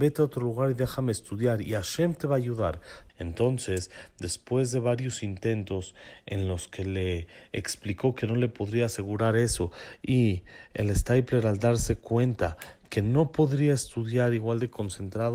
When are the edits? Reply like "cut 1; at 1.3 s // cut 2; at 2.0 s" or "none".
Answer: cut 1; at 3.1 s